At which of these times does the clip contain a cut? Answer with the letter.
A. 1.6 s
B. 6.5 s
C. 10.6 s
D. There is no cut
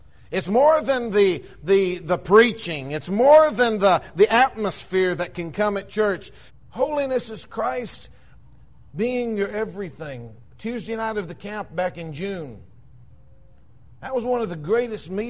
B